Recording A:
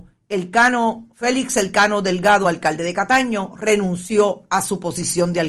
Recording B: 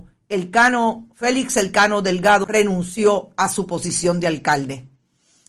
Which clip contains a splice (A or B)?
B